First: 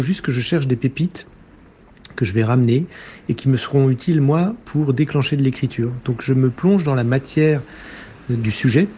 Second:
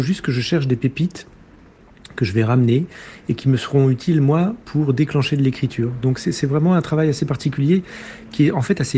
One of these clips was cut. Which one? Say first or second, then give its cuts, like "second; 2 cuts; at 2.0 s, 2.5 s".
first; 1 cut; at 6.0 s